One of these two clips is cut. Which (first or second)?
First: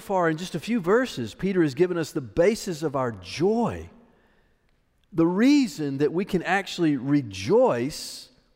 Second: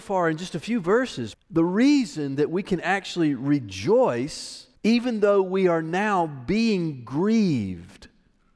second